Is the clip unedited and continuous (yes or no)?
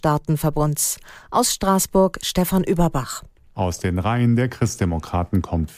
yes